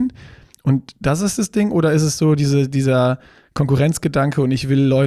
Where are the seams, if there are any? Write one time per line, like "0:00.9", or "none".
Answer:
none